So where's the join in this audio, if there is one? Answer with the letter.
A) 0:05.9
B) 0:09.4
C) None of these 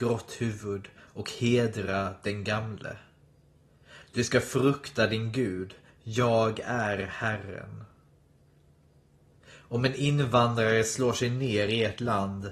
C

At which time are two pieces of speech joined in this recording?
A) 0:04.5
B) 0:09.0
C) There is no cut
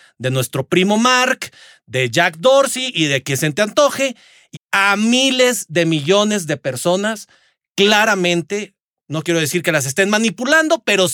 A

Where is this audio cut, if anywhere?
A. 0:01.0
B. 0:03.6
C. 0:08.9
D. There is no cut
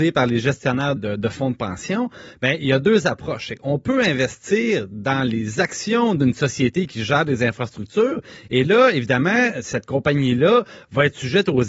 A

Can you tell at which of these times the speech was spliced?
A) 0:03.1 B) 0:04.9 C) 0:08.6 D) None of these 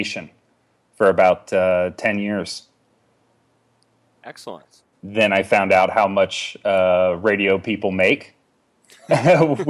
B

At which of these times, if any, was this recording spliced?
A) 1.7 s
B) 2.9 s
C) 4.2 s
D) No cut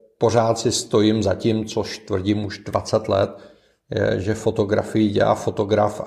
D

